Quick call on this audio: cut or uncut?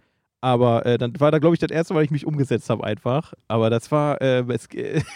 uncut